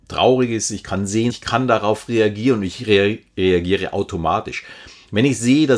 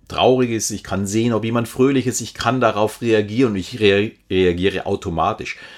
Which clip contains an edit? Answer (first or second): first